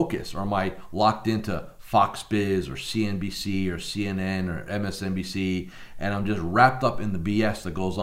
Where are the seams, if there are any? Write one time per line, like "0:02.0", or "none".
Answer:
none